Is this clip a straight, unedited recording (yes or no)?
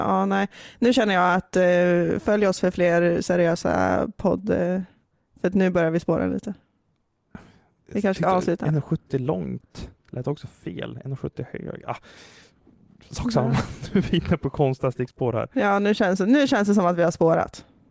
yes